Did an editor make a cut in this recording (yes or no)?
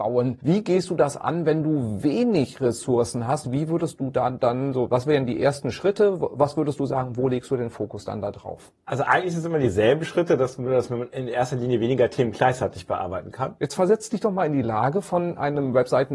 yes